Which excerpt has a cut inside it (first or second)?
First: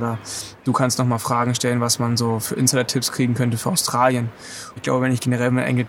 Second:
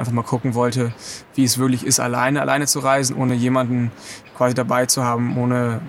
first